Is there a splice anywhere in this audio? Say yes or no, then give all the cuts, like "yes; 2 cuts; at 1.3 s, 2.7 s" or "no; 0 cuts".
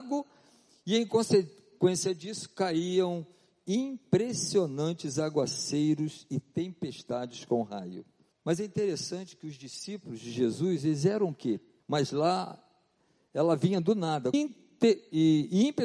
yes; 3 cuts; at 8.3 s, 11.8 s, 14.3 s